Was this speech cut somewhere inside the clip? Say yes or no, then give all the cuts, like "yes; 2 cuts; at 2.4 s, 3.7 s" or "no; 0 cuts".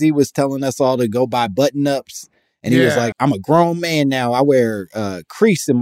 yes; 1 cut; at 3.1 s